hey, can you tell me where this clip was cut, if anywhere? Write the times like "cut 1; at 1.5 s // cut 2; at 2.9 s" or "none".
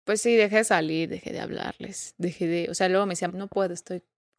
cut 1; at 3.3 s